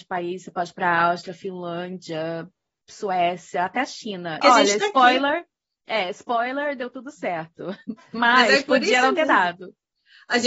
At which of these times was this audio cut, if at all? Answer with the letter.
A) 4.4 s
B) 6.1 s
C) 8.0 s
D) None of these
A